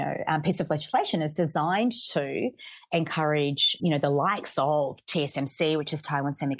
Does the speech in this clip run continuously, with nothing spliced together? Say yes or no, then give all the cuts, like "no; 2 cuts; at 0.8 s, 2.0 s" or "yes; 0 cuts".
no; 1 cut; at 3.8 s